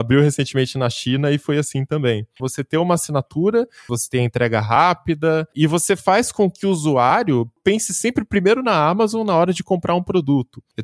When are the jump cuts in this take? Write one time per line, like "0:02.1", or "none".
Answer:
0:02.4
0:03.9